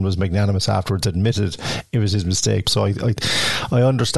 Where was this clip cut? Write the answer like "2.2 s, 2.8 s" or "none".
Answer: 2.6 s

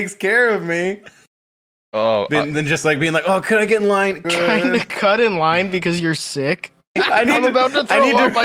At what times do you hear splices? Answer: 4.2 s, 7.0 s

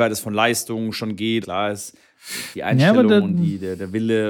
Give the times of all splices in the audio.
1.4 s

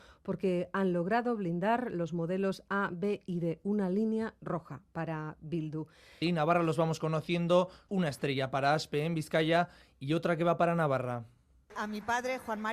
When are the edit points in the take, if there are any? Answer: 6.2 s, 7.9 s

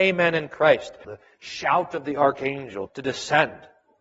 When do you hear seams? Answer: 1.0 s, 2.9 s

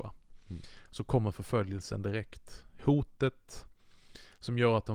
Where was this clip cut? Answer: none

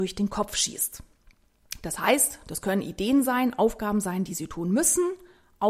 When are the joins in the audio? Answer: none

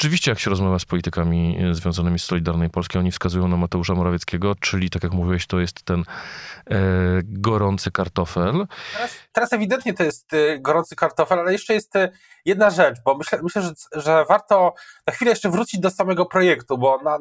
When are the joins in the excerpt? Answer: none

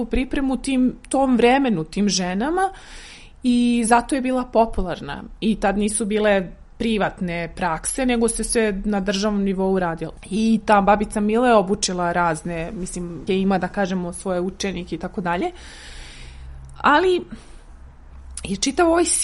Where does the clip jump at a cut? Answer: 13.3 s

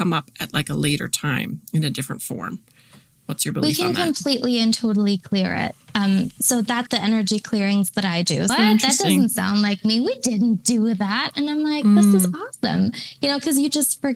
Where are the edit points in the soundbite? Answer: 6.9 s, 8.5 s

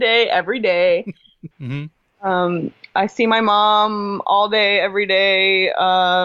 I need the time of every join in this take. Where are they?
1.5 s

